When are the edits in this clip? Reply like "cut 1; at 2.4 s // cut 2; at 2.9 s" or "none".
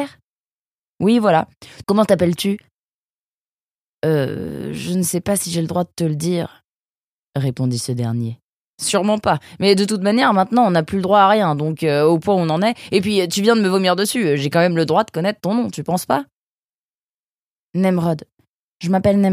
cut 1; at 1.8 s